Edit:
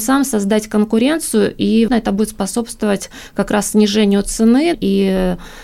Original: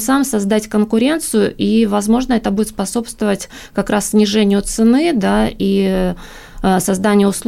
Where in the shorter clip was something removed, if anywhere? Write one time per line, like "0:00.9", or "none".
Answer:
0:01.9
0:04.7

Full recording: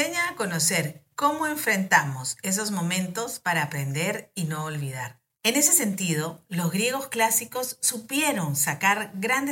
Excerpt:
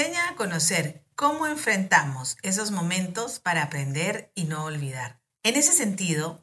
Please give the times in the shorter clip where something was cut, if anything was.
none

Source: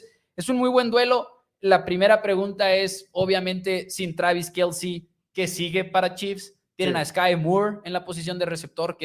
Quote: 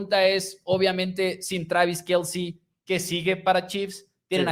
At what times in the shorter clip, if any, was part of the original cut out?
none

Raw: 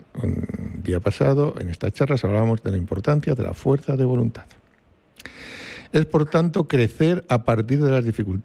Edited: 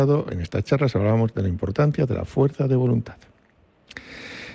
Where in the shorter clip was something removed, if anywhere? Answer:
none

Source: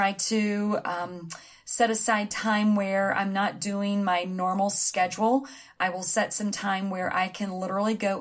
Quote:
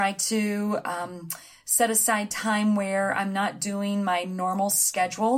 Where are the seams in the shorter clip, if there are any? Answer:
none

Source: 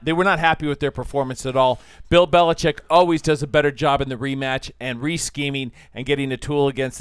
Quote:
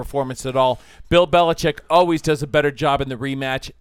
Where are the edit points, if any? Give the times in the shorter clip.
none

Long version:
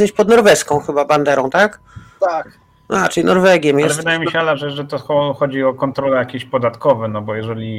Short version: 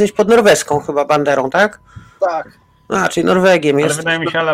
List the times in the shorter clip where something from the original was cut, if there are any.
none

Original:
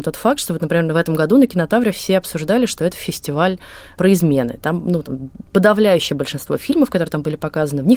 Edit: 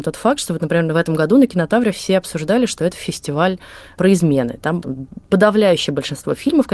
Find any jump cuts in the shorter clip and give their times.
0:04.8

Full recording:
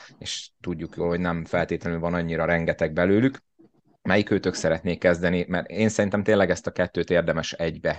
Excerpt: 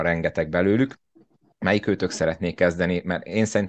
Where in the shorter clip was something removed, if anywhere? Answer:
none

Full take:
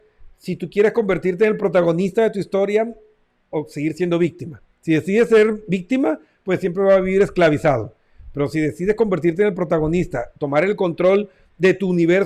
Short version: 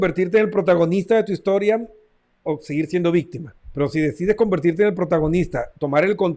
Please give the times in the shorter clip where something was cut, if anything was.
0:03.6

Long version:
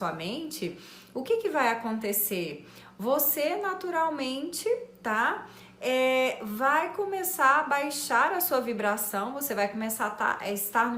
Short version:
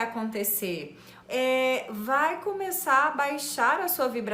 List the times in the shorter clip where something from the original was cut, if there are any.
0:01.2

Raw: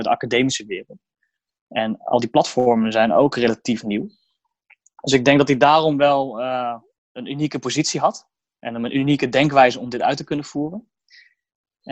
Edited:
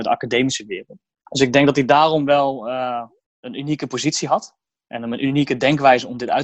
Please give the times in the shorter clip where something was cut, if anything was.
0:01.2

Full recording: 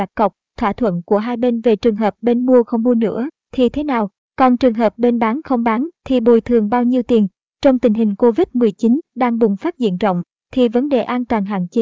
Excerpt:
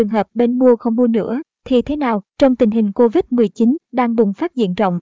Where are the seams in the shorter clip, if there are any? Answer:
0:02.3

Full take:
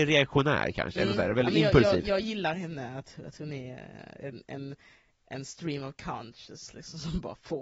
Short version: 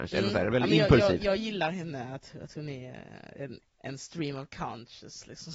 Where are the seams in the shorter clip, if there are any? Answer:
0:03.6

